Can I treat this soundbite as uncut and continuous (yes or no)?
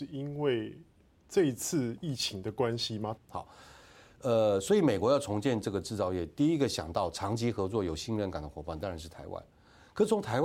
no